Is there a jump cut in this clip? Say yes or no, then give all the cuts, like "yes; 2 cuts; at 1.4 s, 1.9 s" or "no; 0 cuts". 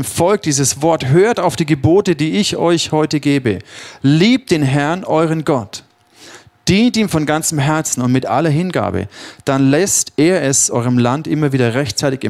no; 0 cuts